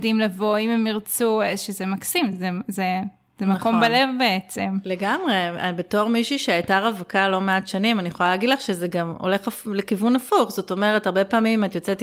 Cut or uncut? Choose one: uncut